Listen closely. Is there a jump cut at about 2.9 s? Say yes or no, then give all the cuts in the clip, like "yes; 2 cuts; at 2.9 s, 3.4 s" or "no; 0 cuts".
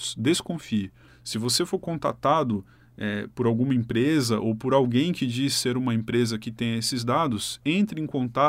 no; 1 cut; at 1.1 s